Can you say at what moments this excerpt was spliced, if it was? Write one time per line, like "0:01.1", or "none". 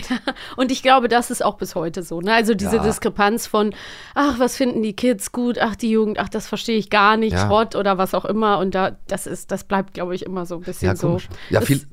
0:07.3